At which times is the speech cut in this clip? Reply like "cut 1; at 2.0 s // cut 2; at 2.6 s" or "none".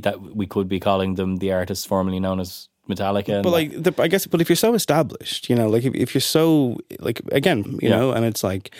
cut 1; at 7.7 s

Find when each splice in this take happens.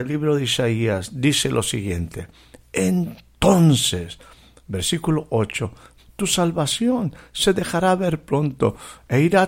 cut 1; at 6.0 s

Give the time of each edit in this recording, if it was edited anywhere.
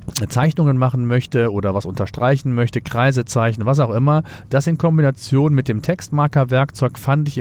none

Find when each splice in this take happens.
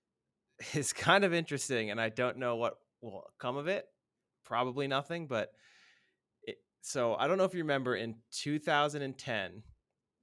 none

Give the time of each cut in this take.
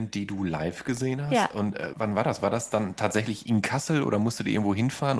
cut 1; at 1.9 s

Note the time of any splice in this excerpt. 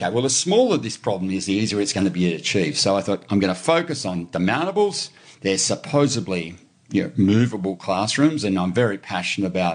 none

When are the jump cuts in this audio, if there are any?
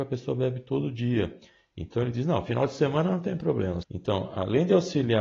cut 1; at 3.8 s

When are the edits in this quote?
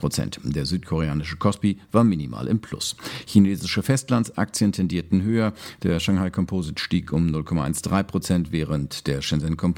none

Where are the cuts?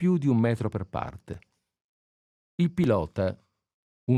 cut 1; at 2.4 s

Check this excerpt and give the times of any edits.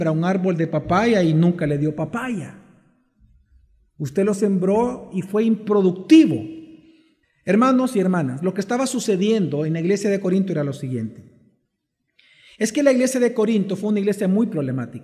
cut 1; at 7.2 s

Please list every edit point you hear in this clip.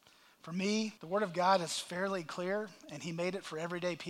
cut 1; at 1.0 s

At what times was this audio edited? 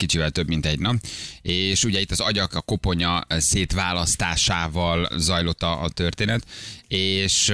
cut 1; at 5.1 s

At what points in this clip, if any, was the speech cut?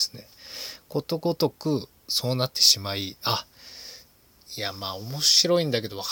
cut 1; at 2.0 s

